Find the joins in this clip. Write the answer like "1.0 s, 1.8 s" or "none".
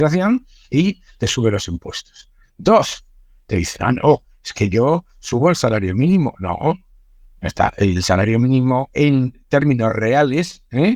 none

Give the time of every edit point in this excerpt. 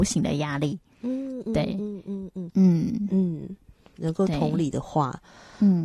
2.5 s, 3.9 s

